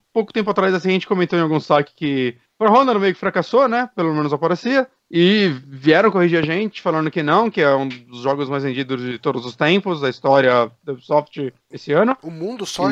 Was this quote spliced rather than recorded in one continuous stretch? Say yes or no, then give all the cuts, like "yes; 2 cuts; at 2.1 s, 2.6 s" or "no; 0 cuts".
no; 0 cuts